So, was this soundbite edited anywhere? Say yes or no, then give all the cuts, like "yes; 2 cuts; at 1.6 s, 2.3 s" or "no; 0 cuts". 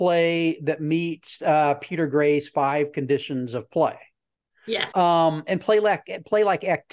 yes; 1 cut; at 4.9 s